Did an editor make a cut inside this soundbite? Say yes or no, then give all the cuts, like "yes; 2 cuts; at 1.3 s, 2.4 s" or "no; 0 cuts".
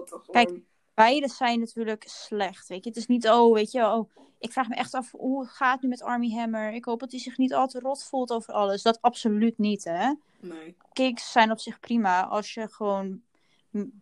yes; 1 cut; at 10.8 s